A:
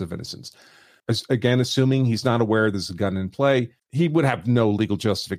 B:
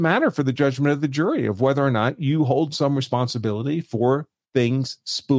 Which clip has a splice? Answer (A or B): A